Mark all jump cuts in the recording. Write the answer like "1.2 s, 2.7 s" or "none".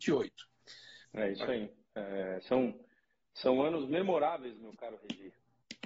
1.0 s